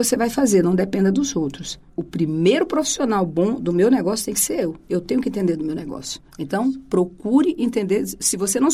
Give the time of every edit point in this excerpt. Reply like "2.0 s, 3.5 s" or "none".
none